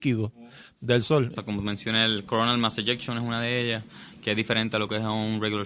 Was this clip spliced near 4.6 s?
no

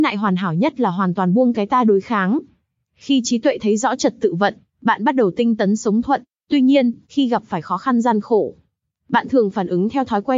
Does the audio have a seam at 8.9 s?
no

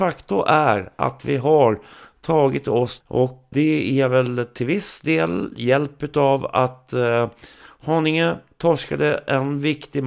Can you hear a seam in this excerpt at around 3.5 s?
yes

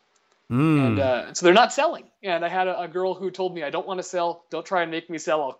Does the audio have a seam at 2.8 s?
no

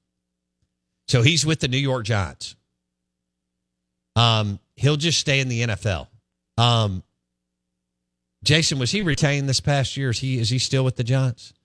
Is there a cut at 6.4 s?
yes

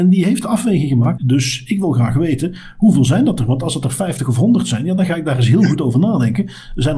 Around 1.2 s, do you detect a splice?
yes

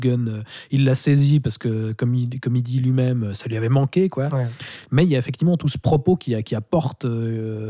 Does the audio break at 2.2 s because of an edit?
no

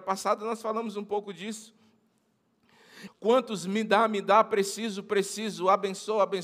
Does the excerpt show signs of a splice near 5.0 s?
no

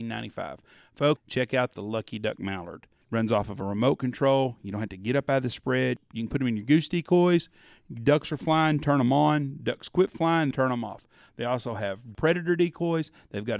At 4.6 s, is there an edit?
no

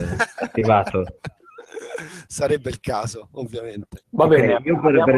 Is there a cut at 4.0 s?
yes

